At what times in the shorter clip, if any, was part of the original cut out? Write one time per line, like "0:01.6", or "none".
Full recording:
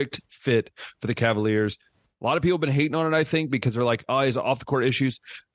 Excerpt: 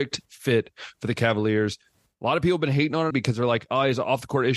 0:03.1